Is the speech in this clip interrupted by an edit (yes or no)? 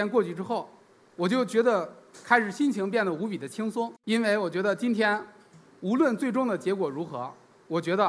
yes